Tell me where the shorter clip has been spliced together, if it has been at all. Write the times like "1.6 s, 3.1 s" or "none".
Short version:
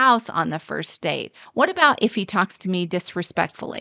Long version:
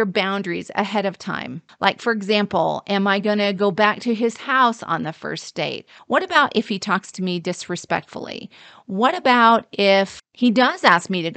none